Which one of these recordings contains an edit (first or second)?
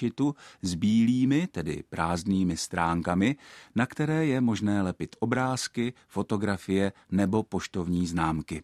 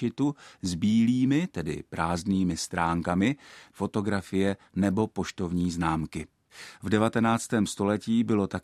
second